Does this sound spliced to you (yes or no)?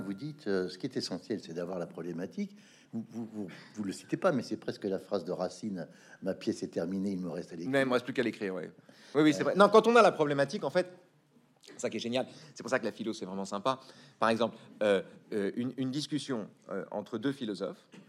no